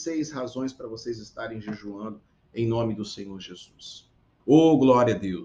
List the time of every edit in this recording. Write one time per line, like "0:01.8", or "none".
0:04.4